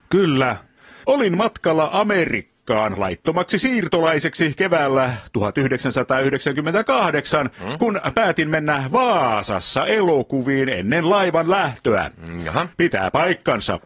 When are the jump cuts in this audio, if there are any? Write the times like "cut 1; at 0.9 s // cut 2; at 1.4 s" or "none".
cut 1; at 1.0 s // cut 2; at 12.7 s